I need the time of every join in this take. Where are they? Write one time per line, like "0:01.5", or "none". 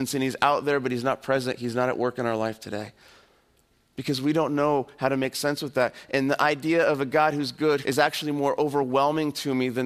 0:07.8